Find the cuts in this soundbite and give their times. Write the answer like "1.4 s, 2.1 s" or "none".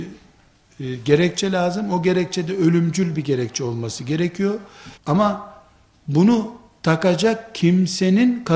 5.0 s